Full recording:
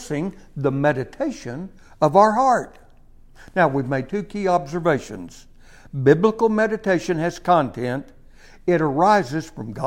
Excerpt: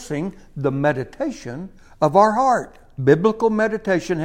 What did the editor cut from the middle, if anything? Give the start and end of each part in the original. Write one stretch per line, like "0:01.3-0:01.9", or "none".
0:03.0-0:06.0